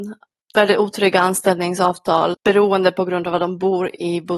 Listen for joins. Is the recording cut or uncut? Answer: cut